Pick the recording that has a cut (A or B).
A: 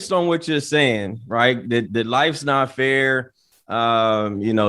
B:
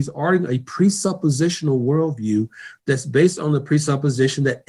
A